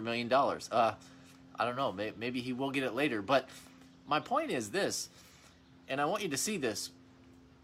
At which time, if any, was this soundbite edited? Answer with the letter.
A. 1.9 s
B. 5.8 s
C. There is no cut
C